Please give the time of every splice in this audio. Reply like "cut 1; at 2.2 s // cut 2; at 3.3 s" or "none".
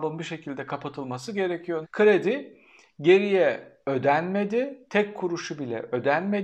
cut 1; at 1.8 s